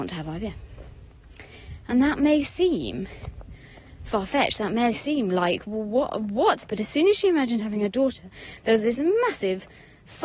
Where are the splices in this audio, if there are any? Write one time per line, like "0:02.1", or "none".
0:06.6